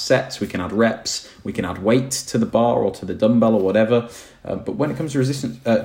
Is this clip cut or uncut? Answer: uncut